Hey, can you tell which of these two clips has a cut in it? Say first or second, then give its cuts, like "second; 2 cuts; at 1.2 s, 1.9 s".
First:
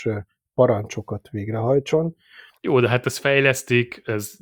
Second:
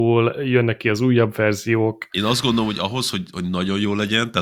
first; 1 cut; at 2.6 s